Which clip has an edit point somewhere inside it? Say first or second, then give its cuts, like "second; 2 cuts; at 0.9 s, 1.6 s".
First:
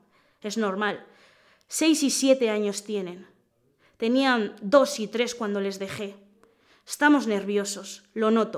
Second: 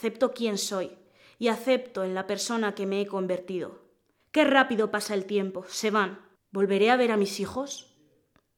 second; 2 cuts; at 4.2 s, 6.4 s